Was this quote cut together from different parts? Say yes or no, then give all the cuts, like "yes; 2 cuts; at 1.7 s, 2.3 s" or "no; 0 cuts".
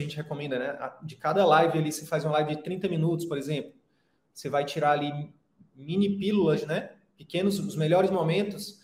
no; 0 cuts